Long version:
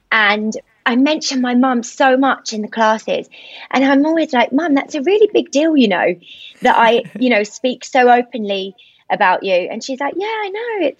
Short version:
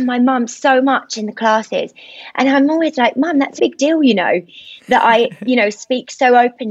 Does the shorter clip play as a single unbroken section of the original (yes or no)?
no